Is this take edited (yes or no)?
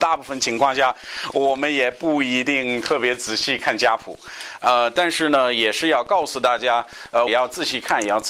yes